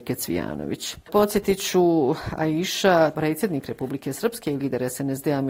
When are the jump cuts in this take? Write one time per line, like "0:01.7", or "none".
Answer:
0:01.1
0:03.1